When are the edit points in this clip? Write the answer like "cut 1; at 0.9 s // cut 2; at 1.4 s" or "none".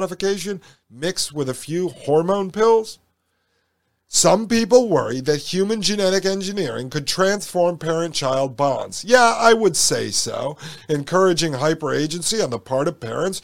none